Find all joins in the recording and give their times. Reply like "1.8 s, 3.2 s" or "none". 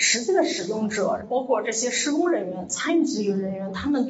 none